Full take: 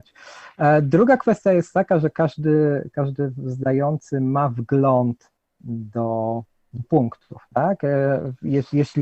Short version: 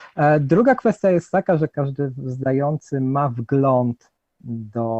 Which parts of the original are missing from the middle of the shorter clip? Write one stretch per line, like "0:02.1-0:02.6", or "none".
0:02.1-0:02.9